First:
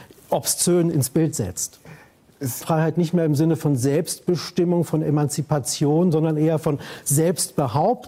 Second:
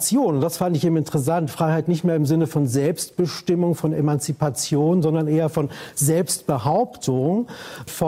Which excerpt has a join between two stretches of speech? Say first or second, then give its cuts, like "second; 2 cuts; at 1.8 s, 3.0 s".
first; 1 cut; at 2.6 s